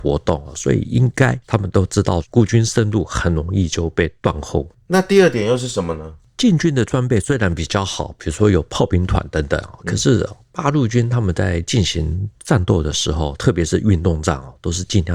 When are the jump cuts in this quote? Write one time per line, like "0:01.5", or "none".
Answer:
none